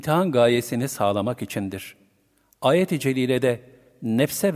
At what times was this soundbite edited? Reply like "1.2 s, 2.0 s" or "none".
none

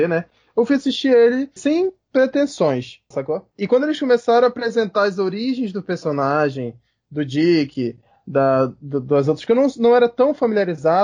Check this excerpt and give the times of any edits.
1.6 s, 3.1 s

